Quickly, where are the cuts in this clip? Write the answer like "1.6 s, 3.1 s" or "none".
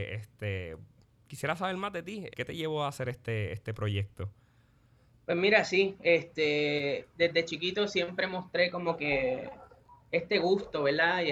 2.3 s